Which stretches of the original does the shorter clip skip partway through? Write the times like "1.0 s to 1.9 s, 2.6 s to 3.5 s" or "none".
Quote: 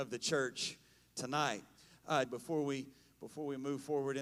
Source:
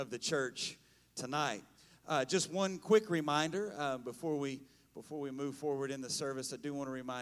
2.2 s to 4.0 s